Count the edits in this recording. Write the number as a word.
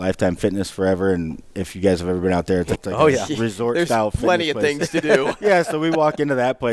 one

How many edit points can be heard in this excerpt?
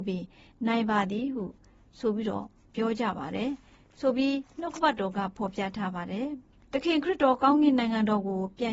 zero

